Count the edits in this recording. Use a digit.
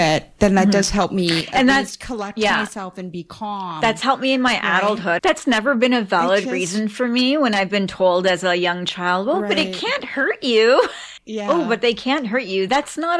2